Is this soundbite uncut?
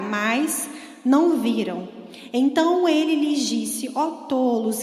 yes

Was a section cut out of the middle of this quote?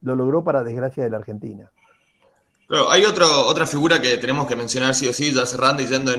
no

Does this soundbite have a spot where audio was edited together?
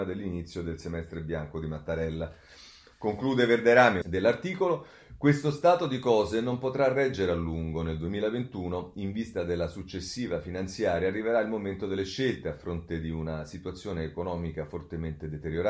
yes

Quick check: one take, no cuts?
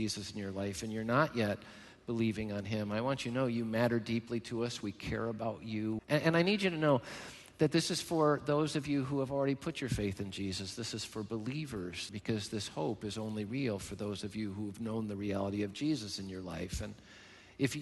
no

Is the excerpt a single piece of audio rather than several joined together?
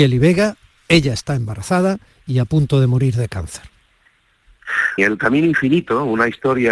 no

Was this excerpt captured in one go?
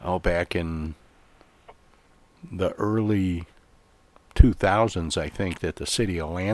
yes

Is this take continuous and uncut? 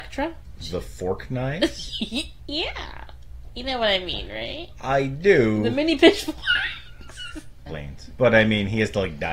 no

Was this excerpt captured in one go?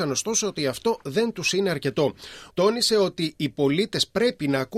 no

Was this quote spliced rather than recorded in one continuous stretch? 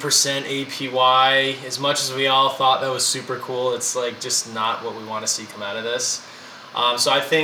no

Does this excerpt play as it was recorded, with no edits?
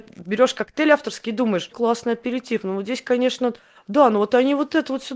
no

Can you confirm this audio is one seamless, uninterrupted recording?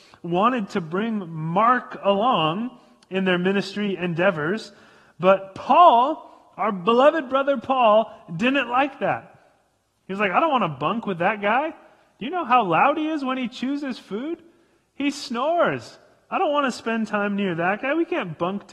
yes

